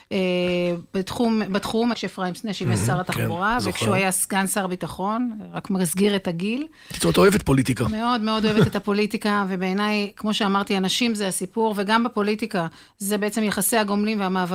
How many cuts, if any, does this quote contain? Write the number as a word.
one